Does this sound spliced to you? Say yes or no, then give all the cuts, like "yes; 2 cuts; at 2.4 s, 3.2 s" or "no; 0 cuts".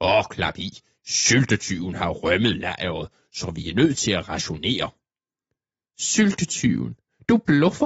yes; 1 cut; at 1.0 s